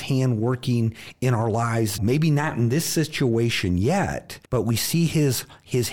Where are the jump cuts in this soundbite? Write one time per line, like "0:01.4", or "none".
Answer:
0:02.0
0:04.4